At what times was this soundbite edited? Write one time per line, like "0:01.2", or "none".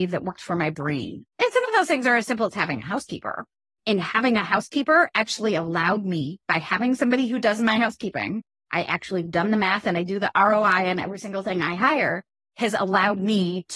0:01.3